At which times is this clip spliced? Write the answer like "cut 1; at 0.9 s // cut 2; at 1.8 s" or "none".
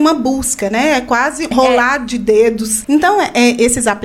cut 1; at 1.5 s // cut 2; at 2.8 s